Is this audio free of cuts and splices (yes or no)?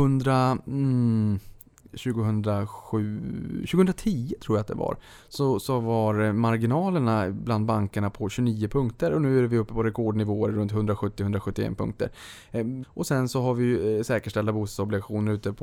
no